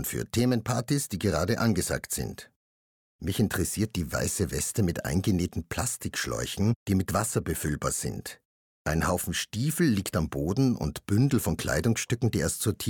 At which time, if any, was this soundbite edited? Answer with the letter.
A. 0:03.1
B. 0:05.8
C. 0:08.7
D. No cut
C